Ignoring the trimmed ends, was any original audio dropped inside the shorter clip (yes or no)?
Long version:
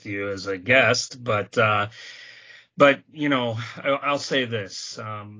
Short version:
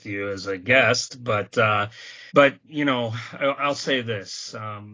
yes